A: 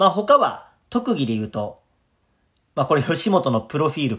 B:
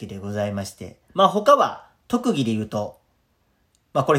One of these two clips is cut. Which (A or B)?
B